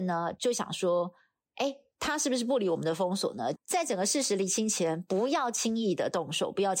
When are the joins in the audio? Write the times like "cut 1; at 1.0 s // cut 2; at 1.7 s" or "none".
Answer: cut 1; at 3.5 s